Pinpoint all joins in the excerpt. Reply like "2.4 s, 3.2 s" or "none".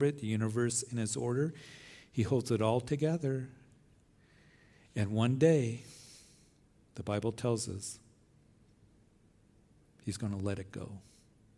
none